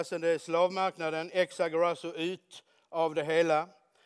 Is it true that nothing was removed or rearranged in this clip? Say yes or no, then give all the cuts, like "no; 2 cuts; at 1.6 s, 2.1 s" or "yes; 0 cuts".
yes; 0 cuts